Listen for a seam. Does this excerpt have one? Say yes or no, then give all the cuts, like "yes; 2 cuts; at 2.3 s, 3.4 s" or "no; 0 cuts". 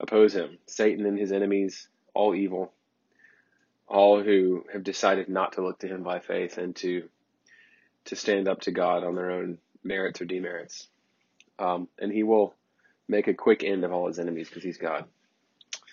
no; 0 cuts